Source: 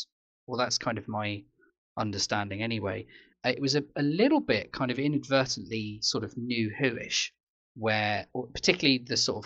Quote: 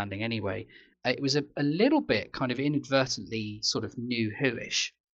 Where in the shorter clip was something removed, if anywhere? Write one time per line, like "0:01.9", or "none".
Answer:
none